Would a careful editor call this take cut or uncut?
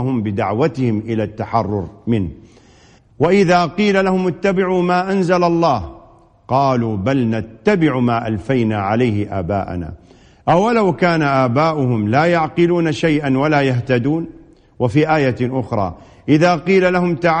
uncut